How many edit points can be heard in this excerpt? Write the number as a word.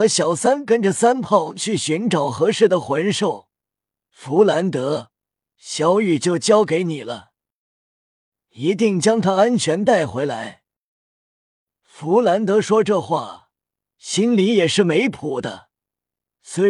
one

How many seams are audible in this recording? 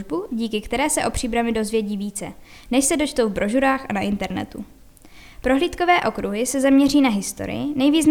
zero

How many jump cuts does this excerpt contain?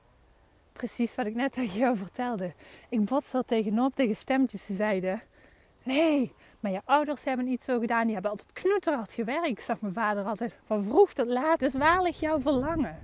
two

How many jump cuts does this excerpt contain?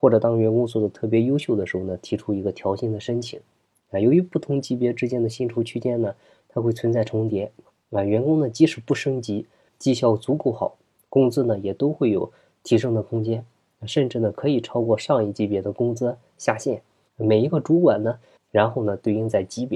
three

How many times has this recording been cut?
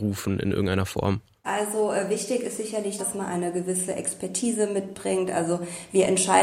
two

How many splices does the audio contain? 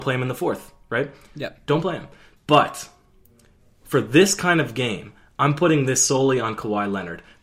one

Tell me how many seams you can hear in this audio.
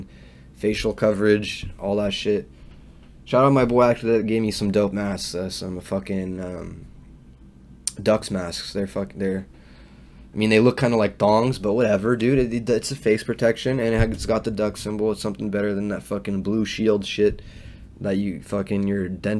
zero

